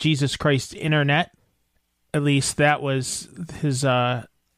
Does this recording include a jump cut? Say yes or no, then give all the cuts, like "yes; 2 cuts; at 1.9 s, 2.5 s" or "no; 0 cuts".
no; 0 cuts